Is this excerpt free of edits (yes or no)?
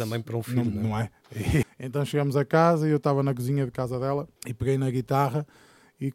no